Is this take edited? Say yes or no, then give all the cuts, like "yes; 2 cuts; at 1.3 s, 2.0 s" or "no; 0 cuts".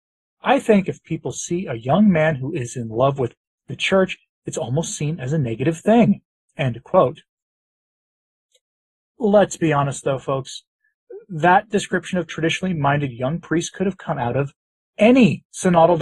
no; 0 cuts